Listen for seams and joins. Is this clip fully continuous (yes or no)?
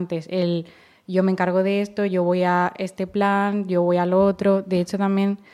yes